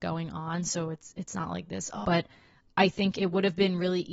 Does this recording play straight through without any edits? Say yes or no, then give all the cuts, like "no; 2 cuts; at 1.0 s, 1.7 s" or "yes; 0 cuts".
no; 1 cut; at 2.0 s